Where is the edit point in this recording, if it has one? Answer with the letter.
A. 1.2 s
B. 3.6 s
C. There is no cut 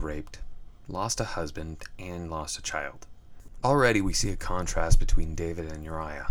B